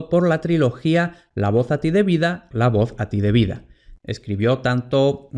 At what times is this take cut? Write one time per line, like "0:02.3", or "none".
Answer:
0:02.5
0:04.0

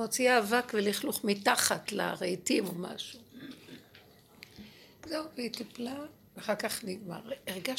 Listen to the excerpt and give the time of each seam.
none

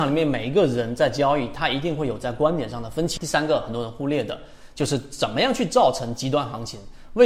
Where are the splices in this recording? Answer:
0:03.2

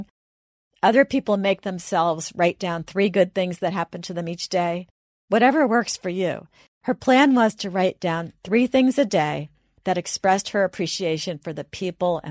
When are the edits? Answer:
0:06.7

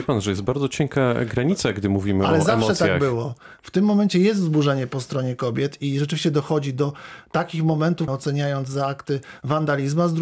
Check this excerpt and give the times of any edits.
0:03.6
0:08.1

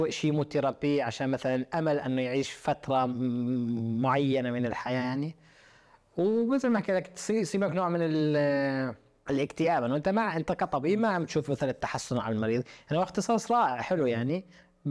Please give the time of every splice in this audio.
0:09.3

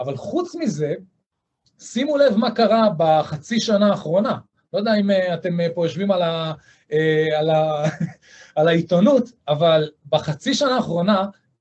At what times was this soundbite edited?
none

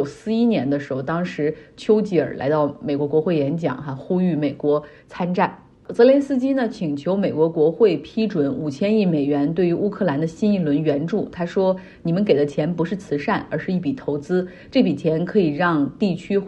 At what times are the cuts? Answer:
none

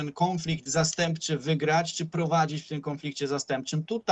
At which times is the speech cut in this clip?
none

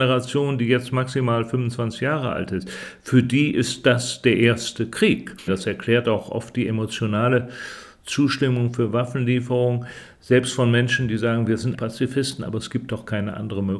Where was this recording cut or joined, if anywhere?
0:05.5
0:11.7

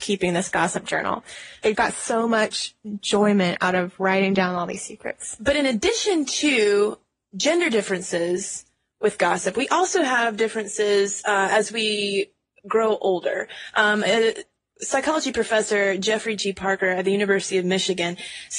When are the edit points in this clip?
0:01.7

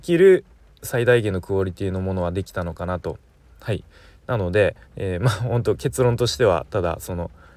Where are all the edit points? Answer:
0:03.5
0:04.8

